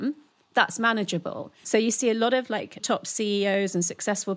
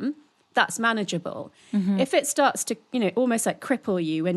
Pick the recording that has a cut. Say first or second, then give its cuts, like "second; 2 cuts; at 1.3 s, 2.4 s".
first; 2 cuts; at 1.6 s, 2.8 s